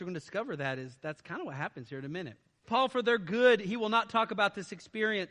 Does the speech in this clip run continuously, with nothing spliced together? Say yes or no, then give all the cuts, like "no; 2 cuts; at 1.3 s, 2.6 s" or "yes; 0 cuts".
no; 1 cut; at 2.6 s